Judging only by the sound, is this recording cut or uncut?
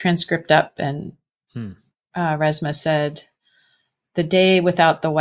uncut